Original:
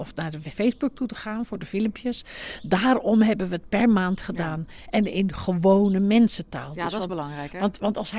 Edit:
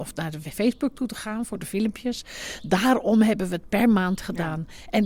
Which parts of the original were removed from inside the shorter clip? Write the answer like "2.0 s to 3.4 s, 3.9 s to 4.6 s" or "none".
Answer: none